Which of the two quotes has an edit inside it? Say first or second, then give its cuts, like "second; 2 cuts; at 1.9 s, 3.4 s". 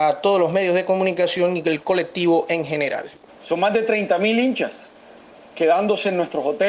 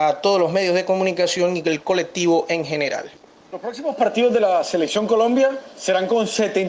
first; 1 cut; at 3.3 s